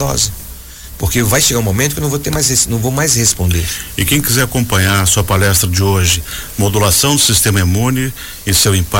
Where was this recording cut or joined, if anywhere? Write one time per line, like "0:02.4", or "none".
none